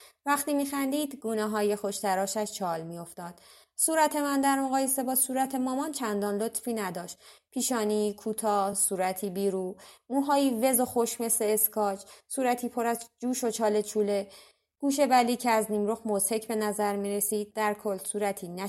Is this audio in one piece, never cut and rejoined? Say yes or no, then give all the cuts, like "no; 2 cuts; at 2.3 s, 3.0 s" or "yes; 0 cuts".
yes; 0 cuts